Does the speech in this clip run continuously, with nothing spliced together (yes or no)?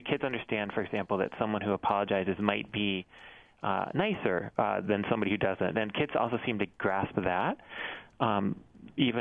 yes